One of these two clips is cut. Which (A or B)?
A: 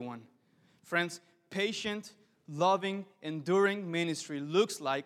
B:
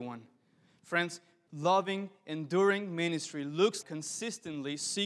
B